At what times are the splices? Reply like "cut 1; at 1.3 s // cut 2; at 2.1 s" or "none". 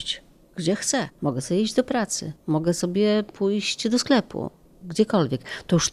none

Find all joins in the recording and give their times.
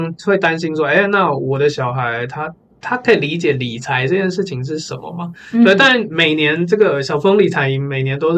none

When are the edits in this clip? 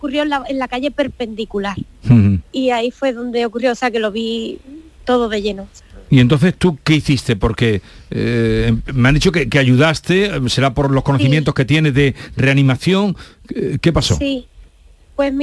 cut 1; at 2.4 s

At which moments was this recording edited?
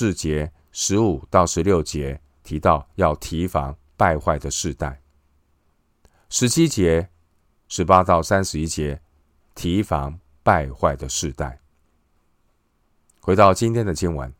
cut 1; at 7.5 s

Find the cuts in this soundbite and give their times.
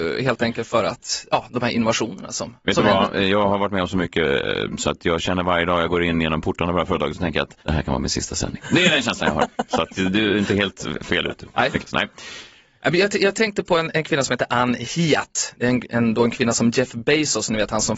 cut 1; at 7.6 s

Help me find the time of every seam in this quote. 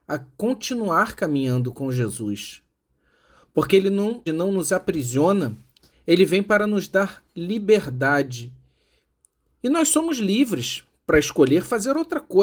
cut 1; at 4.3 s // cut 2; at 5.9 s

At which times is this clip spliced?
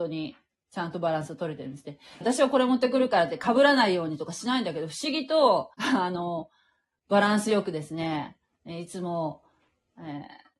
cut 1; at 2.2 s // cut 2; at 5.7 s

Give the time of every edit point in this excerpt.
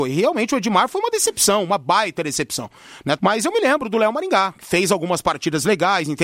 cut 1; at 3.2 s

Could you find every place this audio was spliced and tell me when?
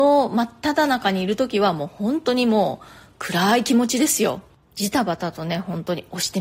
cut 1; at 4.6 s

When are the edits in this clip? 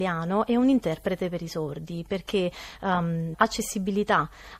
cut 1; at 3.3 s

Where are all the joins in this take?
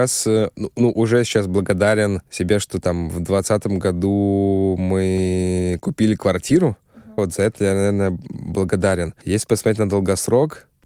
cut 1; at 7.2 s

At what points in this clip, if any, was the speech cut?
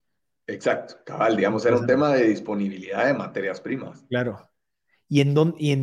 none

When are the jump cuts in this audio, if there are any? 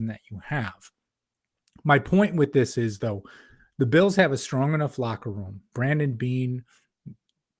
cut 1; at 5.7 s

